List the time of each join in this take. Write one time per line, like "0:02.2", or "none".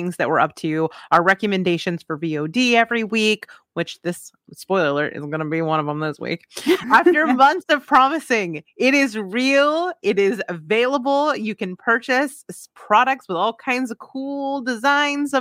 0:06.8